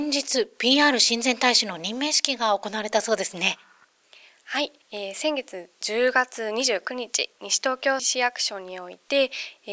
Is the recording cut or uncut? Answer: cut